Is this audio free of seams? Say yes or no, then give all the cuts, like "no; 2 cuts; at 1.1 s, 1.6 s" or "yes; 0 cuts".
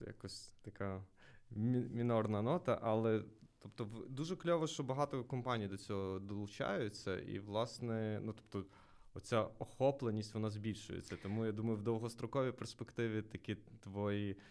yes; 0 cuts